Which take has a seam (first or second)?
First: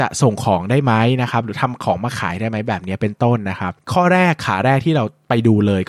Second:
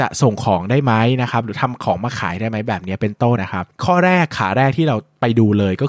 second